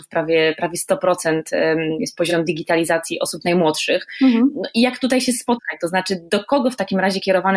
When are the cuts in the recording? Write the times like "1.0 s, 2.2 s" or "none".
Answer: none